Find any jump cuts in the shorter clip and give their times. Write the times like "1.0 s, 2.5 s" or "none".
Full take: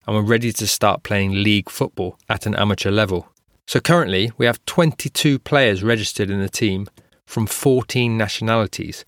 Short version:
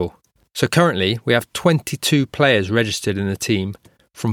none